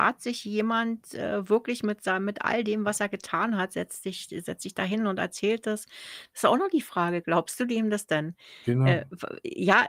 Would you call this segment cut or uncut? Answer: uncut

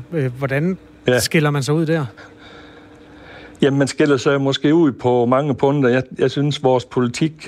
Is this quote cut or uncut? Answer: uncut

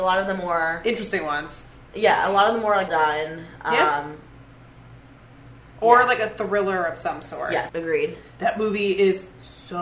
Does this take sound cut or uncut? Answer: cut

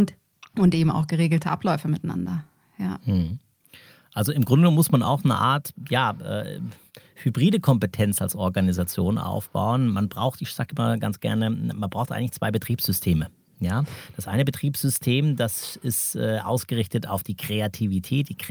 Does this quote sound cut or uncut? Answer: uncut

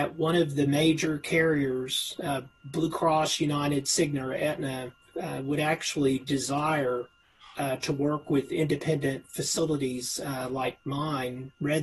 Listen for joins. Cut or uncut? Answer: uncut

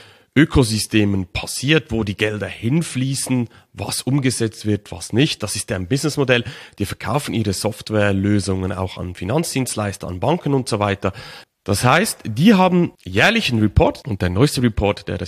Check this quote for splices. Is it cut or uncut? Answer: cut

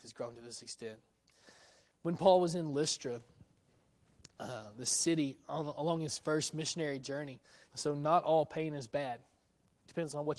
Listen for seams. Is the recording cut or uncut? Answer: cut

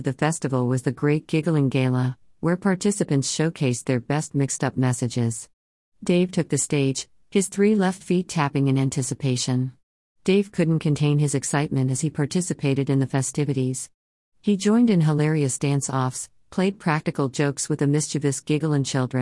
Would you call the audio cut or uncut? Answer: cut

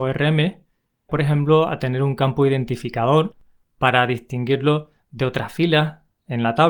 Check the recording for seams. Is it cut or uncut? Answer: cut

